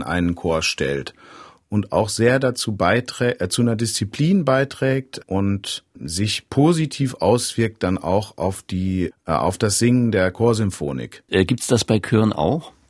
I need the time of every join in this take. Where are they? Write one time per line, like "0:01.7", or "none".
0:11.3